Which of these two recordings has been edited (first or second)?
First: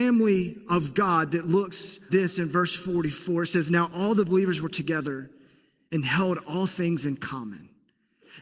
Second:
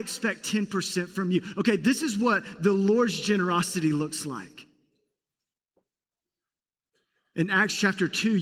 first